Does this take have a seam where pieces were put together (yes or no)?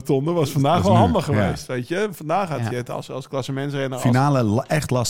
no